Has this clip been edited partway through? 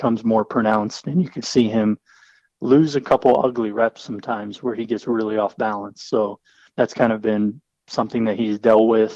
yes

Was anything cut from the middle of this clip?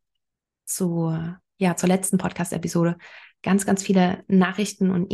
no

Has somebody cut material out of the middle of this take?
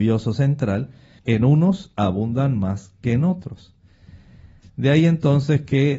yes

